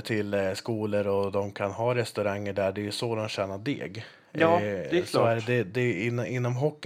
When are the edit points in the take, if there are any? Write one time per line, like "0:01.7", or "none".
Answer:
none